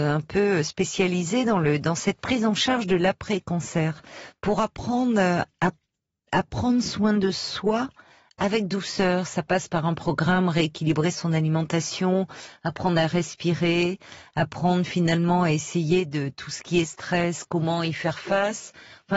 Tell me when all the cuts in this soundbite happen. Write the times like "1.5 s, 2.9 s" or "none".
none